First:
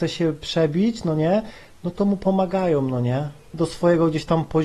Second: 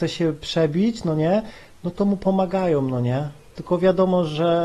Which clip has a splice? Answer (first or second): first